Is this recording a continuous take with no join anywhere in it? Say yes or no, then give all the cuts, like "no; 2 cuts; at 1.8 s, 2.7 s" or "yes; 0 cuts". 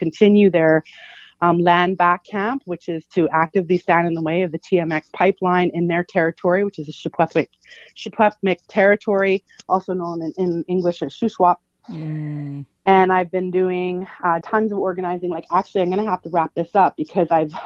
no; 2 cuts; at 11.8 s, 14.4 s